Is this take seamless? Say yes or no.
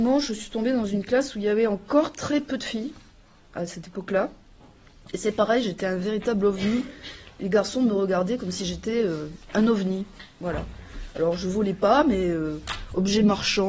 yes